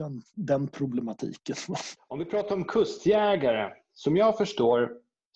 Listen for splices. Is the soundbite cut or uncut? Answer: cut